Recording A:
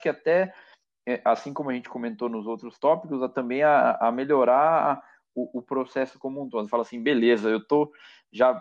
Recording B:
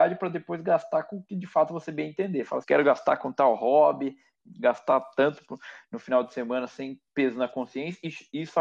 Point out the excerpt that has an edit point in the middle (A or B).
B